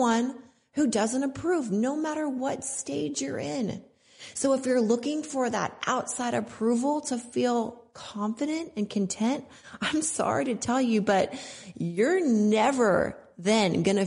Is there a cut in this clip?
no; 0 cuts

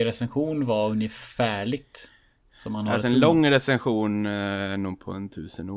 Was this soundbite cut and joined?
no; 0 cuts

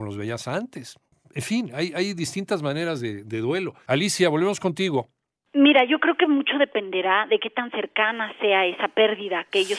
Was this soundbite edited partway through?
yes; 1 cut; at 3.9 s

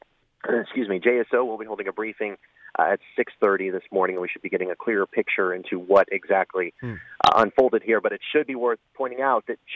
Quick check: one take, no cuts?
yes; 0 cuts

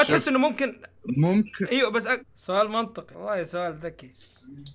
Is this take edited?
yes; 1 cut; at 2.2 s

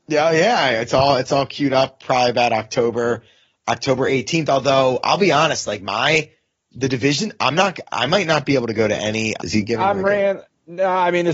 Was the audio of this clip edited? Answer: yes; 1 cut; at 9.4 s

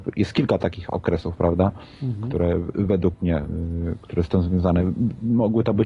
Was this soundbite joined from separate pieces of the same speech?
no; 0 cuts

